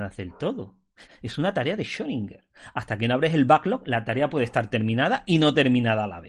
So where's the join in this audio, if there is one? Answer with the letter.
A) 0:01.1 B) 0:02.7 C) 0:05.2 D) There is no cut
A